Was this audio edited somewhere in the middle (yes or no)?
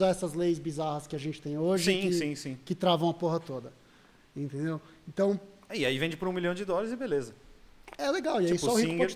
no